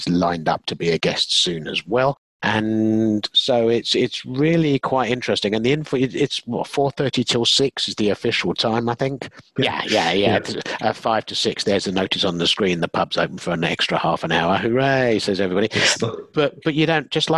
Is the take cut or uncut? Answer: cut